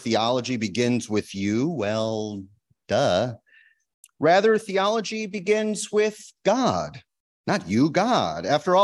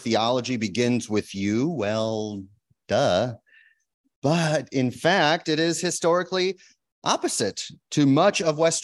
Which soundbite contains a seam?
first; 1 cut; at 4.0 s

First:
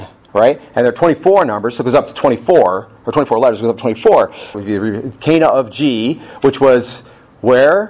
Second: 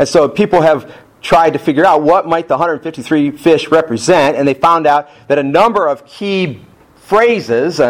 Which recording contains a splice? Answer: first; 1 cut; at 4.5 s

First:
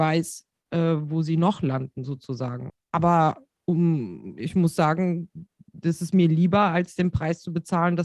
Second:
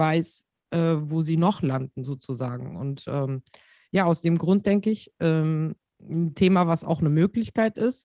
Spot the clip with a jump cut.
first; 1 cut; at 2.7 s

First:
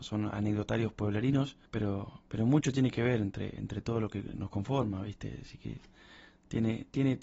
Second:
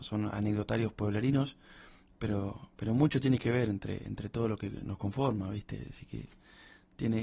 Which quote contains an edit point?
first; 1 cut; at 1.7 s

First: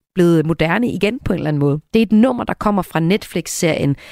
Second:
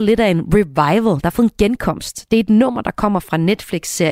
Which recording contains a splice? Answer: first; 1 cut; at 1.9 s

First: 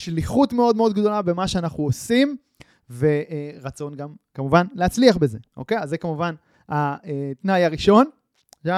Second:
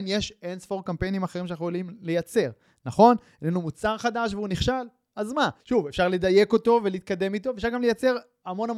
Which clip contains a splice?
second; 1 cut; at 5.6 s

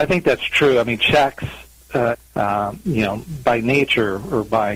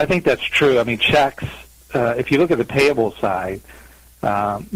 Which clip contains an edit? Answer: first; 1 cut; at 2.1 s

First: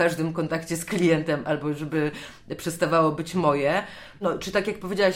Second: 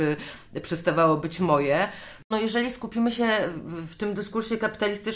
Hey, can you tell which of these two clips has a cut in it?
second; 1 cut; at 2.2 s

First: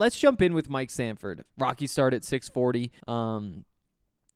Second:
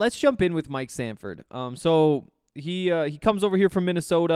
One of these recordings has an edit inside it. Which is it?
first; 2 cuts; at 1.5 s, 3.0 s

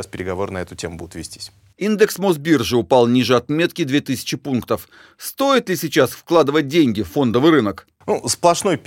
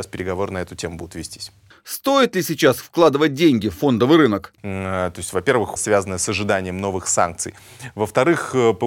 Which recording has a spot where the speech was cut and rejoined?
second; 3 cuts; at 1.7 s, 4.6 s, 5.8 s

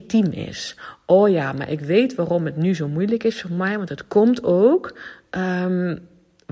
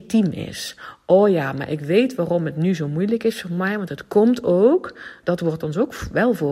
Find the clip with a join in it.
second; 1 cut; at 5.2 s

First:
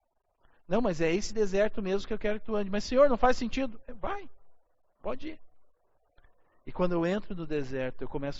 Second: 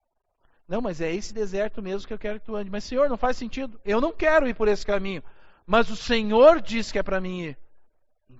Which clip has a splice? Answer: second; 1 cut; at 3.8 s

